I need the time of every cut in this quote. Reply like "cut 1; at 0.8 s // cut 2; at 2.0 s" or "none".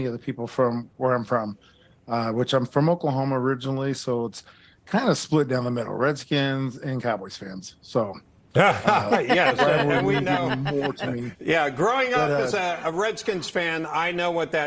none

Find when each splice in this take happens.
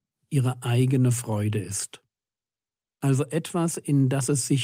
none

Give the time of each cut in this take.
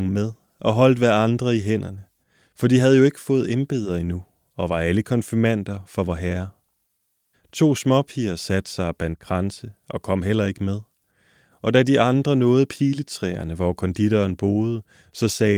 cut 1; at 7.3 s

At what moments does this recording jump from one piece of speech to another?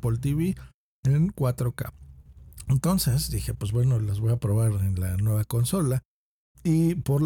none

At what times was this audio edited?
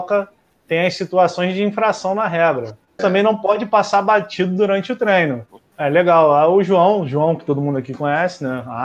cut 1; at 3.0 s // cut 2; at 5.7 s

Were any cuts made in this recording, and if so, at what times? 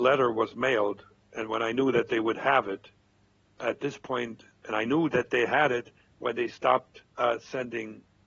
cut 1; at 7.1 s

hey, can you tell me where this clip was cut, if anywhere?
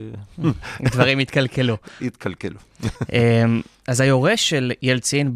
none

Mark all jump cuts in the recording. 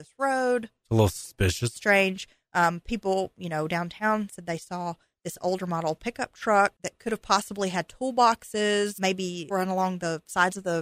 none

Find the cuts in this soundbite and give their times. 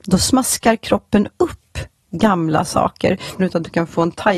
cut 1; at 3.4 s

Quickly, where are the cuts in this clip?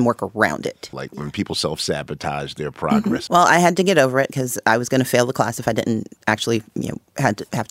cut 1; at 0.9 s // cut 2; at 3.3 s

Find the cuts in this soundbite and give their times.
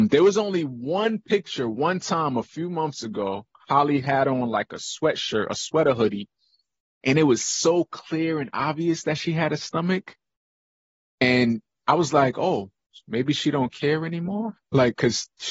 none

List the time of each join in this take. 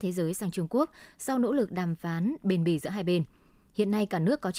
none

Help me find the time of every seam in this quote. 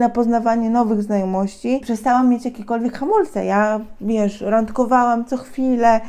none

